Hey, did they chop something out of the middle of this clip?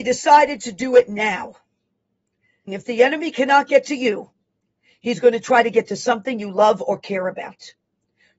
yes; 1 cut; at 2.7 s

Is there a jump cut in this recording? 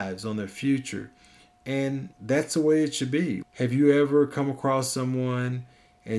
yes; 2 cuts; at 2.1 s, 3.4 s

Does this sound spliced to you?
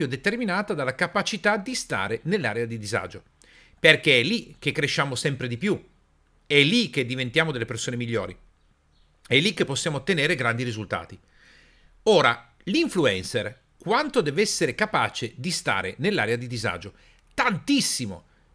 no; 0 cuts

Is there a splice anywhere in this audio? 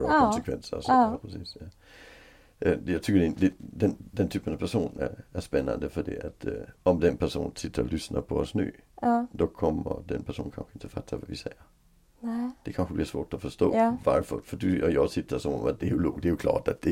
no; 0 cuts

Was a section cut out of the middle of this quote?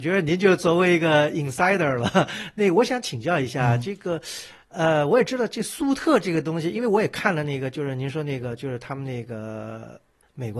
no; 0 cuts

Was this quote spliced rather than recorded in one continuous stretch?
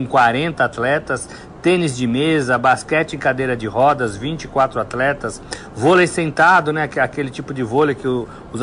no; 0 cuts

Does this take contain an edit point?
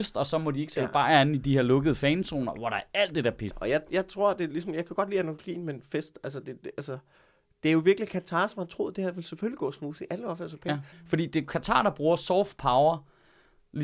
yes; 2 cuts; at 3.5 s, 10.9 s

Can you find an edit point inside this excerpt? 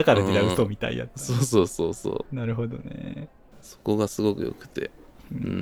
no; 0 cuts

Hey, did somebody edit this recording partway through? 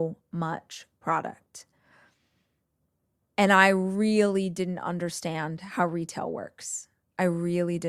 no; 0 cuts

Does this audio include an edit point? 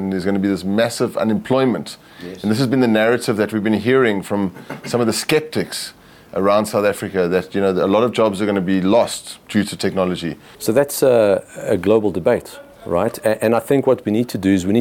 yes; 1 cut; at 10.5 s

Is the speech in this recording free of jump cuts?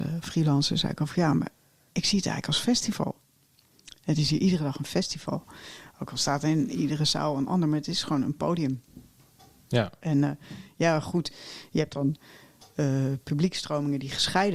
yes; 0 cuts

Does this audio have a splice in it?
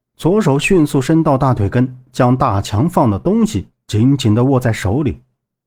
no; 0 cuts

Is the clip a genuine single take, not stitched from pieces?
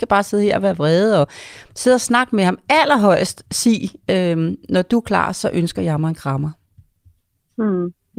yes; 0 cuts

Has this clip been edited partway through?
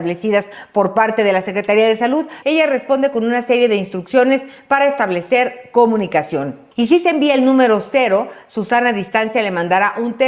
yes; 2 cuts; at 2.4 s, 6.7 s

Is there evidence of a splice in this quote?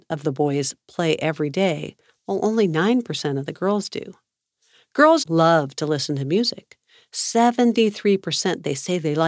yes; 1 cut; at 5.2 s

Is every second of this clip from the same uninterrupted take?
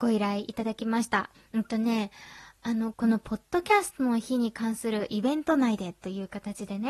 no; 2 cuts; at 1.3 s, 2.9 s

